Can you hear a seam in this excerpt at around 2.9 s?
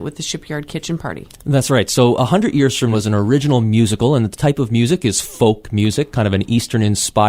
yes; 1 cut; at 2.9 s

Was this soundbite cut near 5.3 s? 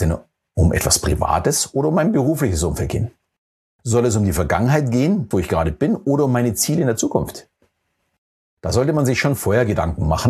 yes; 1 cut; at 5.3 s

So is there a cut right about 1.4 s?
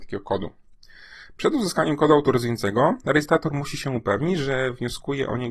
no; 0 cuts

